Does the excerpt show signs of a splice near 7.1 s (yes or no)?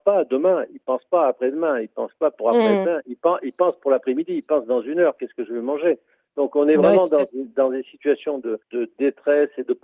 no